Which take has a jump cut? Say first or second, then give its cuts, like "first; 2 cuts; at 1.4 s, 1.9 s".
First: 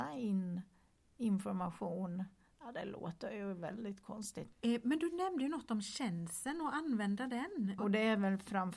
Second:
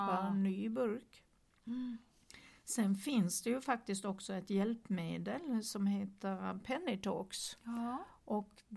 first; 2 cuts; at 4.5 s, 7.8 s